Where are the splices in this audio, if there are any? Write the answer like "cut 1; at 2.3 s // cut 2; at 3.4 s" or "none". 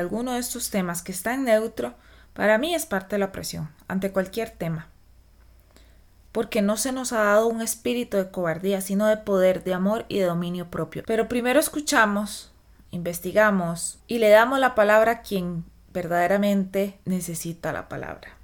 cut 1; at 11.0 s // cut 2; at 12.9 s